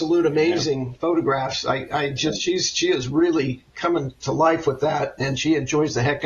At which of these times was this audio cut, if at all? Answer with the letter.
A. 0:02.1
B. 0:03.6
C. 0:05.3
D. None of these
D